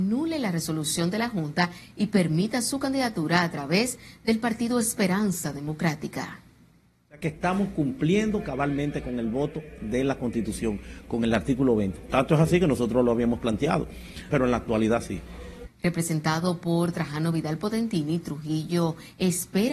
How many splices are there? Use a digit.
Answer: 3